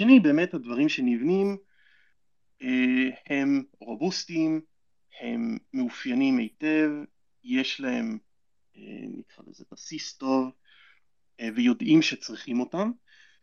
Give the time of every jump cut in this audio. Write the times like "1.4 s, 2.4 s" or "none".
none